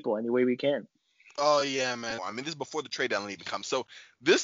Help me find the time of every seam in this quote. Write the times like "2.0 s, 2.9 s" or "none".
2.2 s

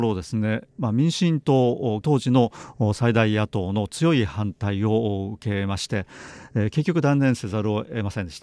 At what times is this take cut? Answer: 2.0 s

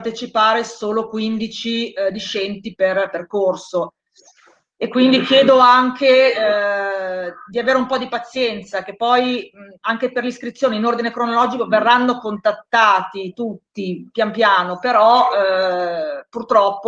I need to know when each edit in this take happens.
none

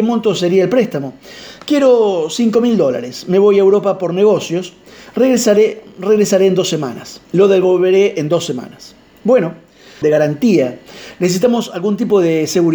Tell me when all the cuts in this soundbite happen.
7.2 s, 10.0 s

